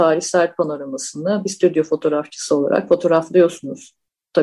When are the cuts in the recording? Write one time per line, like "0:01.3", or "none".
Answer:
none